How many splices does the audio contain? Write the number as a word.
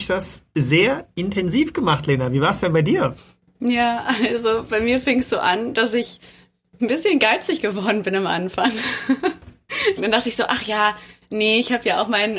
one